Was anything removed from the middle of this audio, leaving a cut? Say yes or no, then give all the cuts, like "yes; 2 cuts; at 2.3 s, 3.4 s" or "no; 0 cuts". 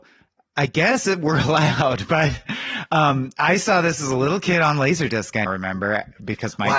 yes; 1 cut; at 5.5 s